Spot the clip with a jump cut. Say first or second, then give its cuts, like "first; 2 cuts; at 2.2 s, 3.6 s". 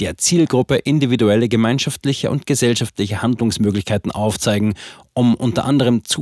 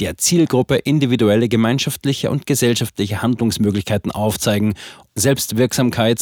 second; 1 cut; at 5.1 s